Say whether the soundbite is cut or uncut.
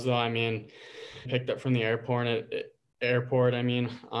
cut